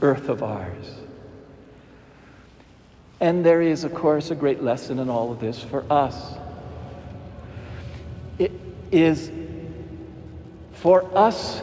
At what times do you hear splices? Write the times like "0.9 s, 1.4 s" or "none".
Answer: none